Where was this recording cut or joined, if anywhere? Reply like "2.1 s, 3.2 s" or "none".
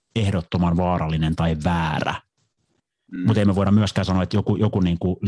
none